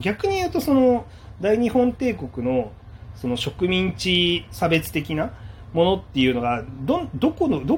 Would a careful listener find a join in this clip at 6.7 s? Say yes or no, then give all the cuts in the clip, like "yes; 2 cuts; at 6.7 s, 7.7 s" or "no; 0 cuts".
no; 0 cuts